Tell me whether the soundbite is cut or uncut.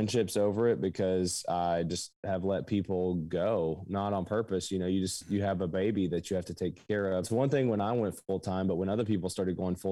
cut